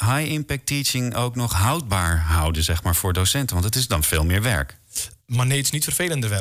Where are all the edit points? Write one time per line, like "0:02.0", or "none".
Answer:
0:05.2